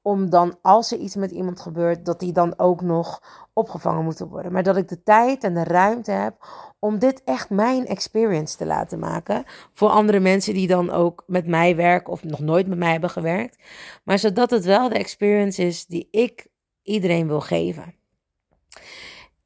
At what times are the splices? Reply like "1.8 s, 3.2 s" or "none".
none